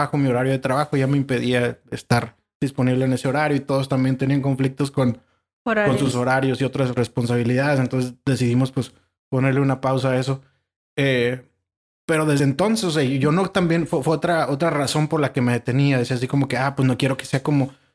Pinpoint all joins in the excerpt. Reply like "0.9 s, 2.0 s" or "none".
none